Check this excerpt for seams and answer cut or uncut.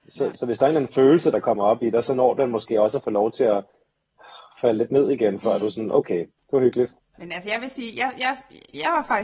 cut